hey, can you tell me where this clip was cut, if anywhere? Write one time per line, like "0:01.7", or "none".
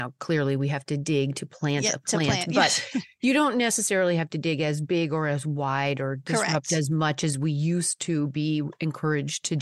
none

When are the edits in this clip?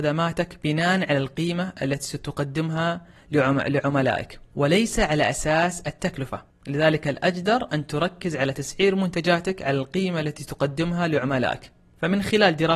0:06.5

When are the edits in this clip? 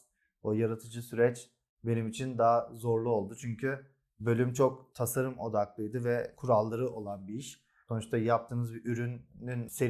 none

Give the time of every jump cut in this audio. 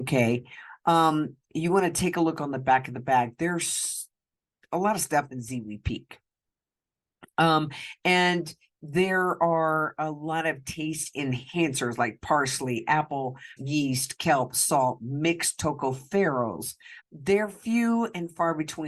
0:13.6
0:17.0

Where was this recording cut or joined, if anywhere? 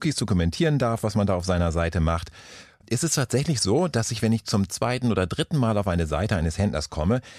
none

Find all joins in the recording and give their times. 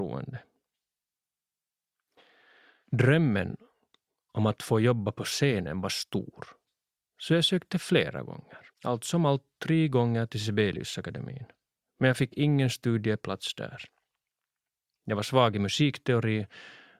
0:08.7

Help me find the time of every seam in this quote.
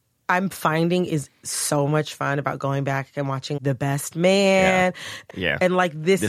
0:03.6
0:05.3

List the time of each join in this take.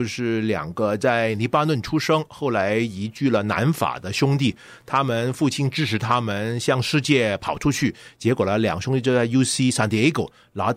none

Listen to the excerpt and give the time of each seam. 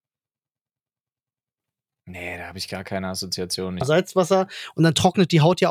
0:03.8

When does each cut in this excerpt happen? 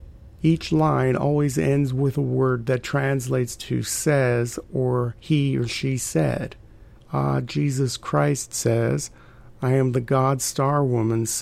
0:07.0
0:09.5

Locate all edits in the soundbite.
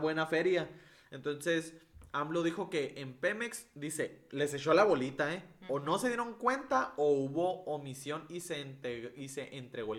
none

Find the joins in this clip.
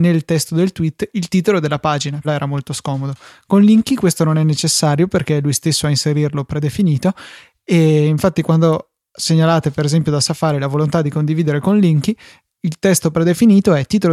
0:02.2

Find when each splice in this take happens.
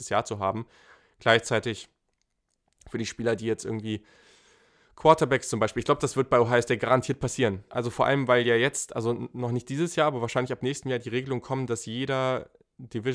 0:07.7

